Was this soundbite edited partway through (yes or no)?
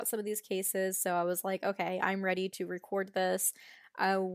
no